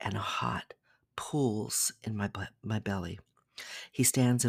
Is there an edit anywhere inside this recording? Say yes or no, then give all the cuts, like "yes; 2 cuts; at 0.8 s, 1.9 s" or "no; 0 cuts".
no; 0 cuts